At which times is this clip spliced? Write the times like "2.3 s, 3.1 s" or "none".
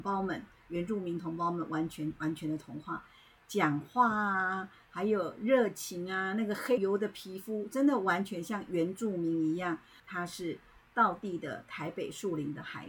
6.8 s, 10.0 s